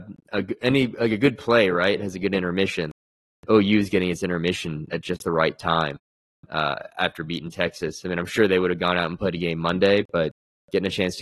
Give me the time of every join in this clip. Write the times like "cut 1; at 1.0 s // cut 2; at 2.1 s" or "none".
none

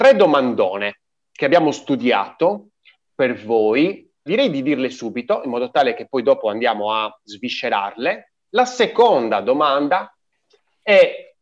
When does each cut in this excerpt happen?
cut 1; at 4.3 s // cut 2; at 8.5 s

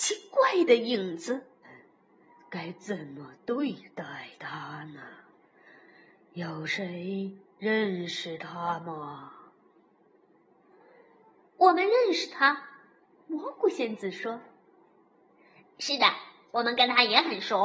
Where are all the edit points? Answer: cut 1; at 1.6 s

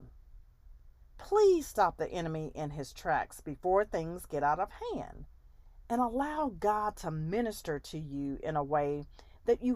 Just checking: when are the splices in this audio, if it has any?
none

